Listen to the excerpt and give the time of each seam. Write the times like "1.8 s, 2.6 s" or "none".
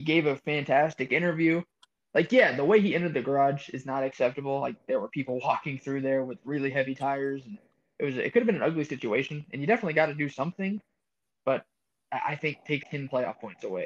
12.8 s